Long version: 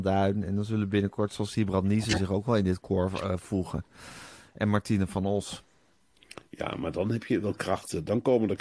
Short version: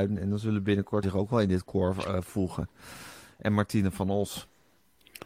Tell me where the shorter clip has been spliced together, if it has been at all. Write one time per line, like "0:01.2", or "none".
0:01.0